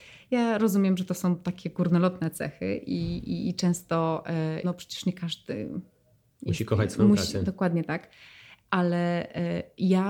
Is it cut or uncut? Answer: cut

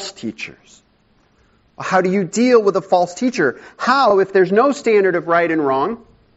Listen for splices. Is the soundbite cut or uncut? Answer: uncut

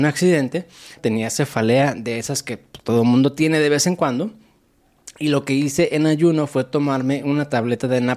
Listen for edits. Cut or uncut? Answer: cut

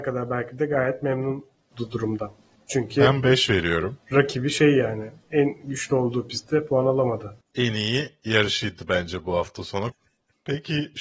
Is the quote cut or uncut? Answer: cut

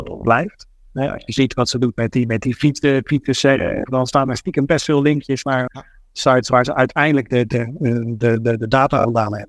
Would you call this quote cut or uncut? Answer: cut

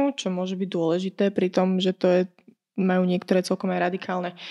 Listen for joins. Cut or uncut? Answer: uncut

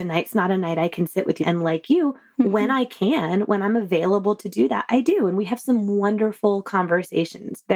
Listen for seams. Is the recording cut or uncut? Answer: cut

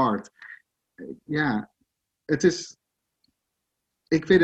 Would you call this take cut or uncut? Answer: uncut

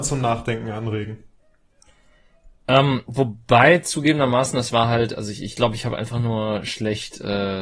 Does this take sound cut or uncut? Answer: uncut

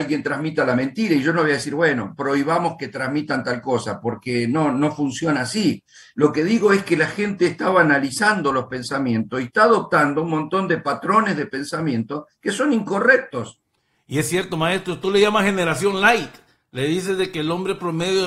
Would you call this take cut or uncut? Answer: uncut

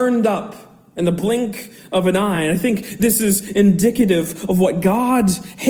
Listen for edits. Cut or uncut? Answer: uncut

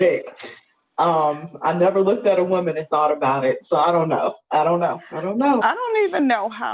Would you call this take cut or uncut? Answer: uncut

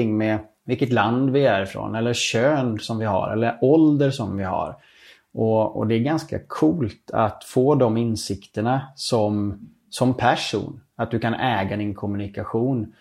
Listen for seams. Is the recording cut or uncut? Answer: uncut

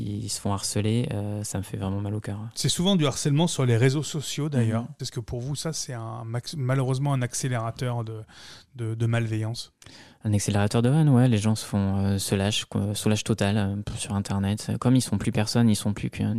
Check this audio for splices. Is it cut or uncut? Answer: cut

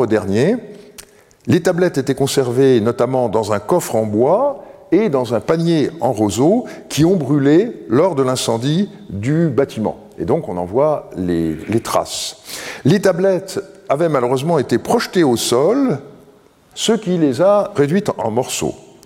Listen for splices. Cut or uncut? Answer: cut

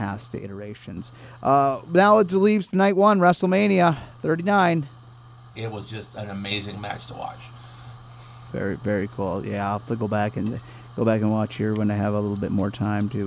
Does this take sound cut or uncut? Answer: cut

